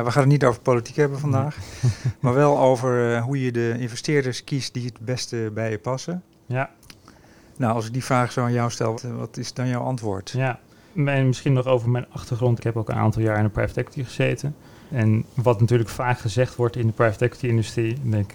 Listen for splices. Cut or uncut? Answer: cut